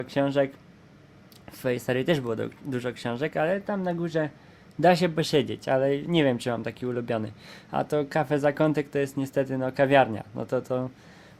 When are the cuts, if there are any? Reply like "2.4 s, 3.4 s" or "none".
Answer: none